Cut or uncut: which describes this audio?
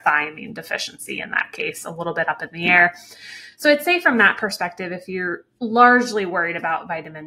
uncut